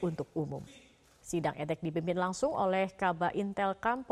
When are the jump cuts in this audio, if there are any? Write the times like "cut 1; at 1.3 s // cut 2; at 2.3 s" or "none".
cut 1; at 1.2 s